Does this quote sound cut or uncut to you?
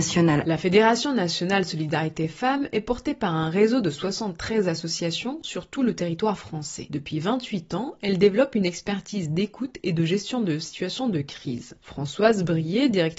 uncut